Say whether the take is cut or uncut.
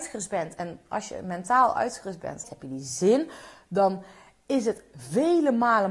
cut